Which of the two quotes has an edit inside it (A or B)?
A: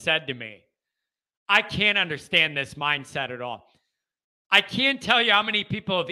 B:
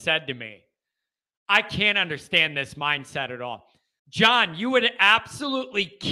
B